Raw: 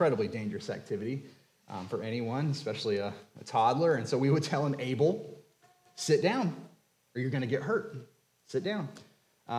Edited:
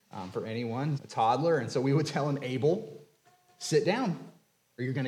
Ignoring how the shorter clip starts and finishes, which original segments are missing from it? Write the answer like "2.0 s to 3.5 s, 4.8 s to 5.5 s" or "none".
2.5 s to 3.3 s